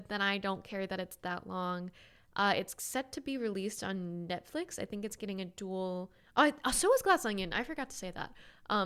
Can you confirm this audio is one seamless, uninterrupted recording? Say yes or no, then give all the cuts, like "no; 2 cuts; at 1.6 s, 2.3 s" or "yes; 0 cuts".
yes; 0 cuts